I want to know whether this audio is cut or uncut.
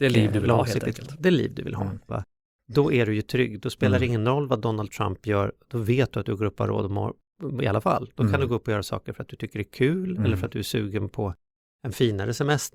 cut